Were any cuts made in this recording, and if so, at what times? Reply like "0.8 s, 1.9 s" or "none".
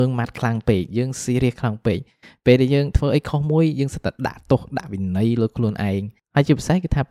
none